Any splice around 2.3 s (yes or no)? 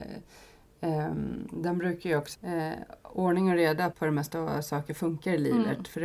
yes